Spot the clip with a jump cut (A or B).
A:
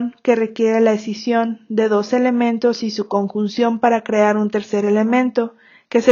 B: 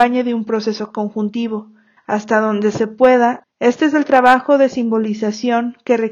B